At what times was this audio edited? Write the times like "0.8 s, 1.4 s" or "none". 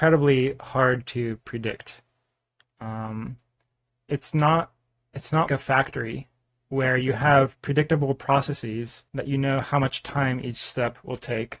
5.5 s, 9.1 s